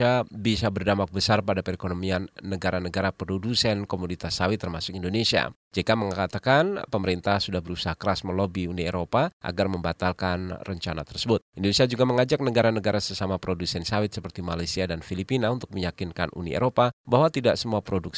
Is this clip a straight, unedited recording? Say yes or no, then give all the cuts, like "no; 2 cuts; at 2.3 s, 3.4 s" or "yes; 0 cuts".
yes; 0 cuts